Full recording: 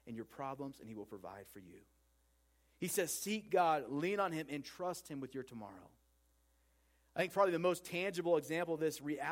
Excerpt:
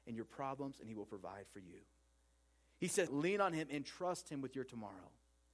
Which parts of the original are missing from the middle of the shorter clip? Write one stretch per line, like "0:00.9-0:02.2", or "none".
0:03.1-0:03.9